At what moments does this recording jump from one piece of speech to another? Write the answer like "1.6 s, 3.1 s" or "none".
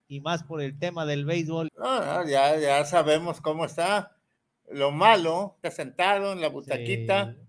1.7 s, 5.6 s